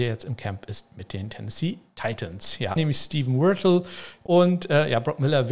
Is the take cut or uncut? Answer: cut